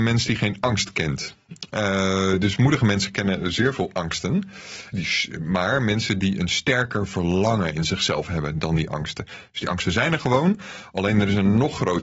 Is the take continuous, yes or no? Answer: no